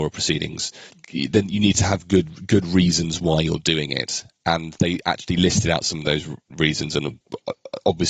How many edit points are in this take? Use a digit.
0